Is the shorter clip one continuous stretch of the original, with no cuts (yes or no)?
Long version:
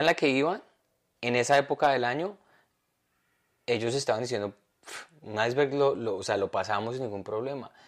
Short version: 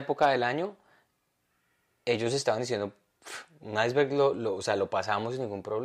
yes